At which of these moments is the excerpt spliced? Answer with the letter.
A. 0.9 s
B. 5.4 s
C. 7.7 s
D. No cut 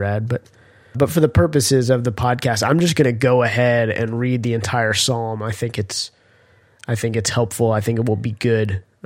A